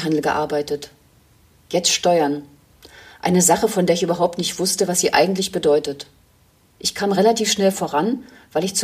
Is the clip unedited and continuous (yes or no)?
no